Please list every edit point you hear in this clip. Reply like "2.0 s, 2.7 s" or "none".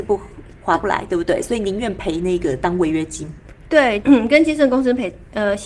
4.0 s